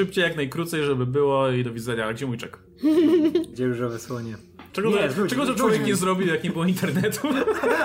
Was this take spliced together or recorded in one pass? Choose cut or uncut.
cut